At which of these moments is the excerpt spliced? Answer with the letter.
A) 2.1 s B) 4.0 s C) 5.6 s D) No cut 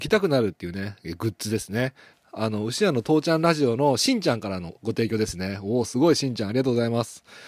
A